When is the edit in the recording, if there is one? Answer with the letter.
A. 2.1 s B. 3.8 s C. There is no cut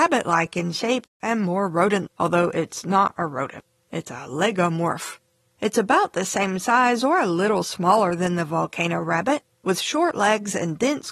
A